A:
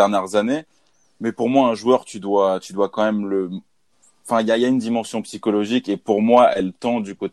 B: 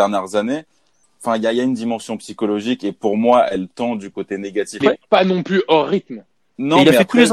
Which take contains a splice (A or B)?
B